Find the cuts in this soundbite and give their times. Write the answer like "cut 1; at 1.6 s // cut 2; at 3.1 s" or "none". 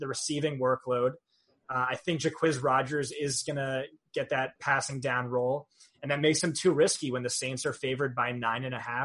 cut 1; at 4.6 s